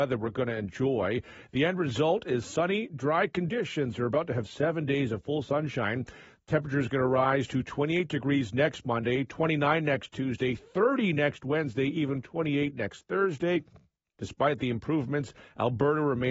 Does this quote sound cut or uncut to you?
cut